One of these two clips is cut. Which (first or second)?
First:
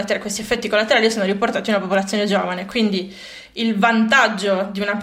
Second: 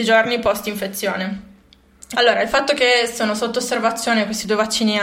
second